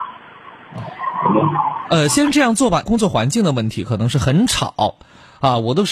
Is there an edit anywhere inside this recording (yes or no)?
yes